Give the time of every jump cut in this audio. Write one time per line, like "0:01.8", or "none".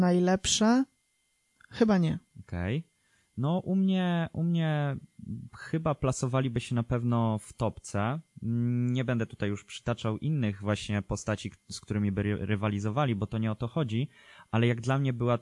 0:02.3